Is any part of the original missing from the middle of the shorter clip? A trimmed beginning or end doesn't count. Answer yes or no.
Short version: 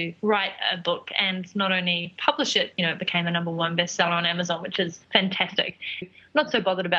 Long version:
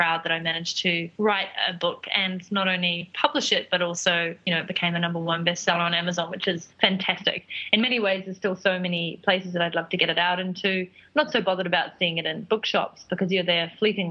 yes